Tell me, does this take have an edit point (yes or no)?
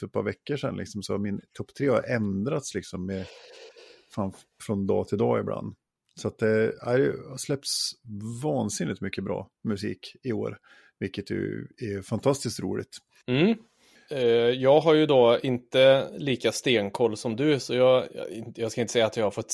no